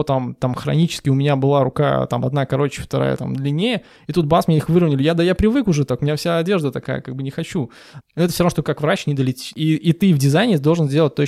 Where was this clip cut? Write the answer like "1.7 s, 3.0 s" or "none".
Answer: 8.0 s, 9.5 s